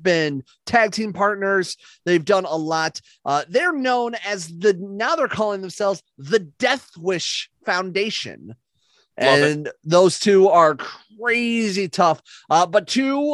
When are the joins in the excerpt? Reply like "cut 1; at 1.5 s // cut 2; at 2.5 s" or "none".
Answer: none